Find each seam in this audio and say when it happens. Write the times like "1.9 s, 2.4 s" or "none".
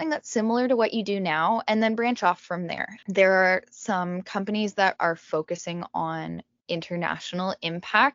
3.0 s, 5.0 s

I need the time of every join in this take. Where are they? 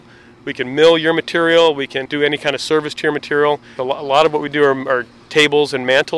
3.8 s

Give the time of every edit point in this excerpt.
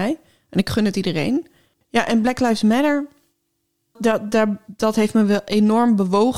4.0 s

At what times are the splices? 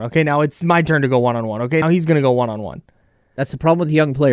1.8 s

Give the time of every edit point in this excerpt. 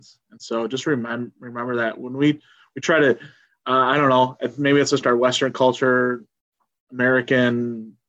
none

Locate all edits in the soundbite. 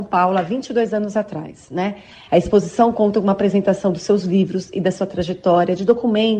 2.3 s

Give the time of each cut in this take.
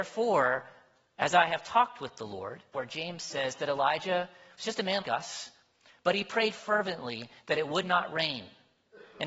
2.7 s, 5.0 s

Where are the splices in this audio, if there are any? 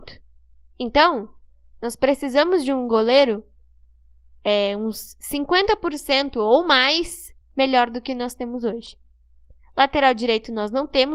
7.4 s

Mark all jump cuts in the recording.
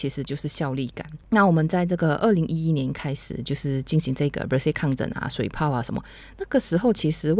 1.2 s

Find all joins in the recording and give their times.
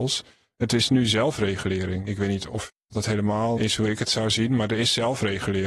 2.1 s, 3.6 s

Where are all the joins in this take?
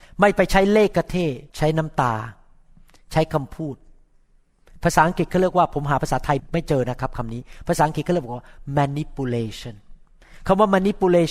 1.5 s

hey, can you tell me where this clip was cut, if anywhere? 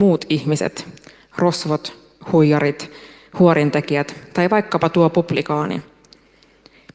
none

